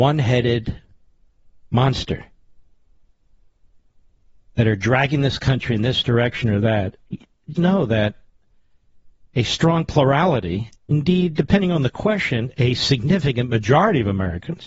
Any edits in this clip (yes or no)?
yes